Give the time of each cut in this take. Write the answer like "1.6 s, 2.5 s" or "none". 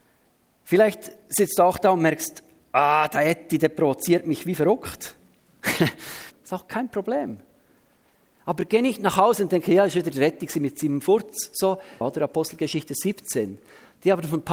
6.3 s, 12.0 s